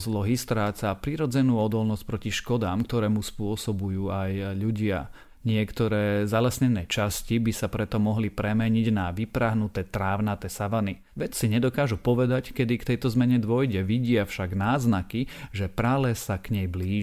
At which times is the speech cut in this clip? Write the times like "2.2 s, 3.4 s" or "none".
none